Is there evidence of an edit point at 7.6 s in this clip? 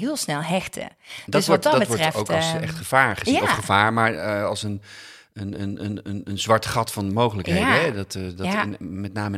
no; 0 cuts

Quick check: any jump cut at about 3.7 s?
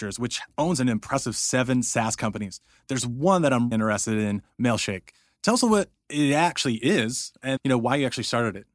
yes; 2 cuts; at 3.7 s, 7.6 s

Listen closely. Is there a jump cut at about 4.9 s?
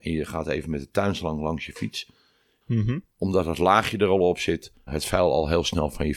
yes; 2 cuts; at 2.6 s, 4.9 s

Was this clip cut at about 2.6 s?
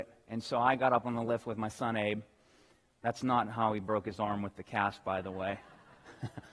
no; 0 cuts

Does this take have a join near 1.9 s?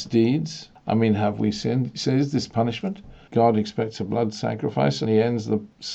no; 2 cuts; at 3.3 s, 5.1 s

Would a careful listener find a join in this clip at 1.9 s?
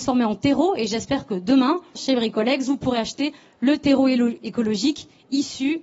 yes; 1 cut; at 1.9 s

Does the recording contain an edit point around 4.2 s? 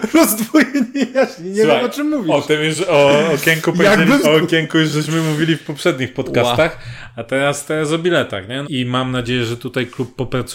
yes; 2 cuts; at 4.2 s, 8.6 s

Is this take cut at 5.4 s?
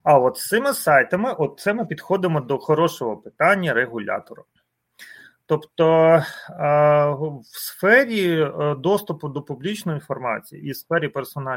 no; 0 cuts

